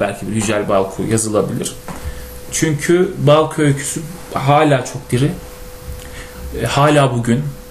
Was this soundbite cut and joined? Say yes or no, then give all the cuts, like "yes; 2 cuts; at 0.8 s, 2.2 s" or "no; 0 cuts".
no; 0 cuts